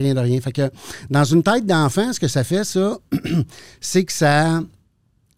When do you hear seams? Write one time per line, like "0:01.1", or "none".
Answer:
none